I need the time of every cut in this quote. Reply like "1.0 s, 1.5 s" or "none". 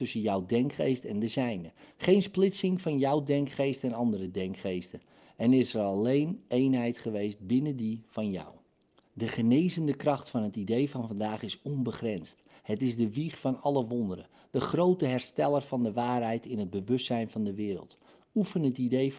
none